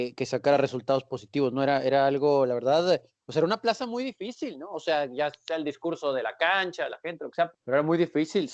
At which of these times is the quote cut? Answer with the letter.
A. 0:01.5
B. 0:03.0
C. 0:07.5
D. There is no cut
C